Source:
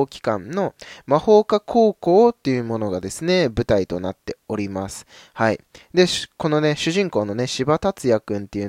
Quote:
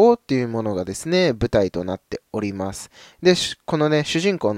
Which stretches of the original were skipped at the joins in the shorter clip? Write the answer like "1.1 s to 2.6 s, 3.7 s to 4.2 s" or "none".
5.3 s to 5.8 s